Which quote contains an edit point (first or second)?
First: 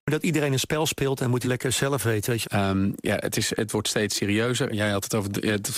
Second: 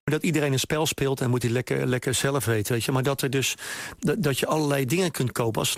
first